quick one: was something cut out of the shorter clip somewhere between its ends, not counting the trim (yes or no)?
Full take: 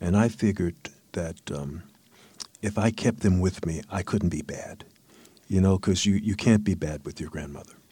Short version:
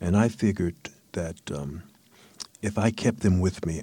no